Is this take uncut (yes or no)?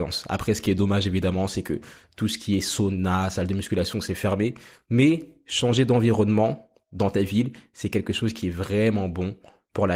yes